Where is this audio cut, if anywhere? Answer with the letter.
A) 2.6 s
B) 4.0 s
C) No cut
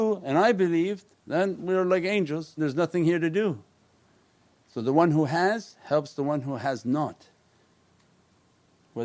A